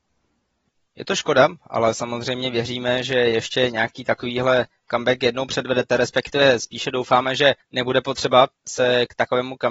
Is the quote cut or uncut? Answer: uncut